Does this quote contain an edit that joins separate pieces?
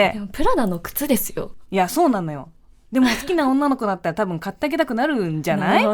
no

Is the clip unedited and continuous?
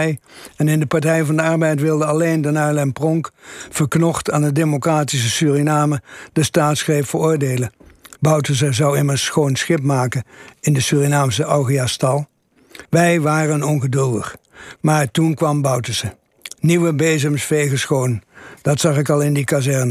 no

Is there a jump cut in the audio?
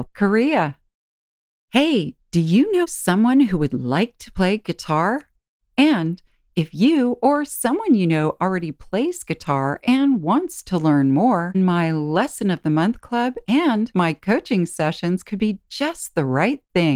yes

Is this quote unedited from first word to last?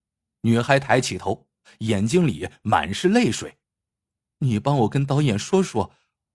no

